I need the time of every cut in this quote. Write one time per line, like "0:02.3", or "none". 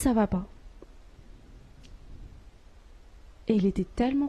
none